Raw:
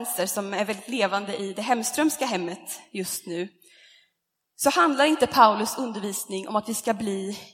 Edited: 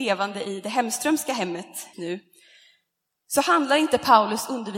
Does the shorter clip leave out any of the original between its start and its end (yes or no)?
yes